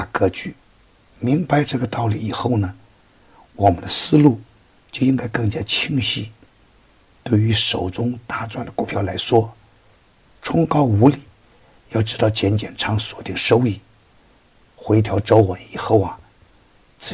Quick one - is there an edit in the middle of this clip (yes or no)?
no